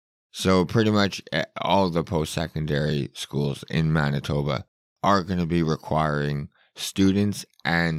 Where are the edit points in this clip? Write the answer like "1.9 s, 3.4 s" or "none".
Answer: none